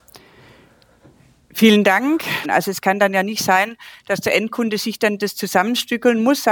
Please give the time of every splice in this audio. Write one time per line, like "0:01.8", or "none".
0:02.4